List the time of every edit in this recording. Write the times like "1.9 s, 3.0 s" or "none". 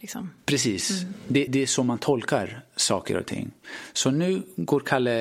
1.5 s